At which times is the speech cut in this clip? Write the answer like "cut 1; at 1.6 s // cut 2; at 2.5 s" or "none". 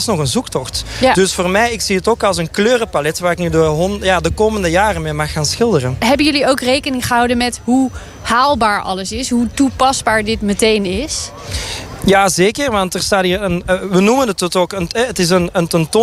cut 1; at 13.6 s